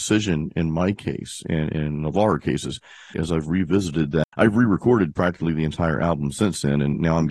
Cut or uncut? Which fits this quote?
cut